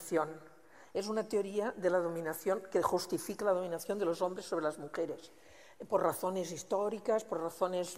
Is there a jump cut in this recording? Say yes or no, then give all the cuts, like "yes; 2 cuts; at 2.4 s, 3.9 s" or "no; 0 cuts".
no; 0 cuts